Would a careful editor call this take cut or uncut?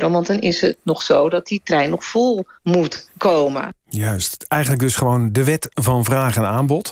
uncut